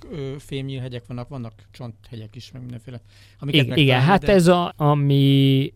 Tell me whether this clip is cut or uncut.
cut